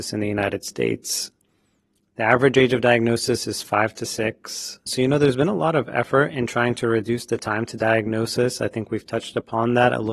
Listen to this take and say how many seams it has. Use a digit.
1